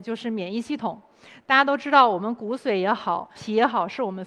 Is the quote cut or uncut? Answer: cut